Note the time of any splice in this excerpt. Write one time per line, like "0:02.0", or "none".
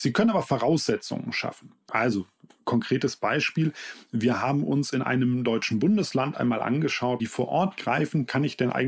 0:01.9
0:07.2